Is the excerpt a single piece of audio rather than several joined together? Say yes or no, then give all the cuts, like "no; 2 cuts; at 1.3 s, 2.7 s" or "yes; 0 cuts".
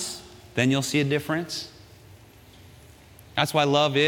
yes; 0 cuts